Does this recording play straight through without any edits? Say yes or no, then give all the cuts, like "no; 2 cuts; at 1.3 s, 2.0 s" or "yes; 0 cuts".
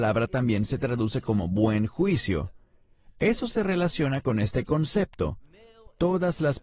yes; 0 cuts